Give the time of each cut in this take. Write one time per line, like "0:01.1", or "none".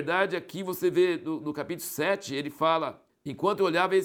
0:03.1